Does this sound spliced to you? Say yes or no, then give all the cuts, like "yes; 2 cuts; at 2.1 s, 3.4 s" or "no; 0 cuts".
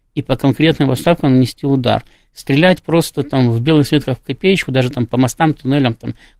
no; 0 cuts